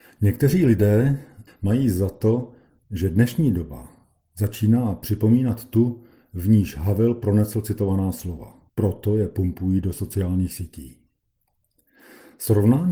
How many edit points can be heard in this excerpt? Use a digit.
2